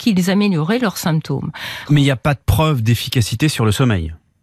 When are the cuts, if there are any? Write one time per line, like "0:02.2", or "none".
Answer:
0:01.9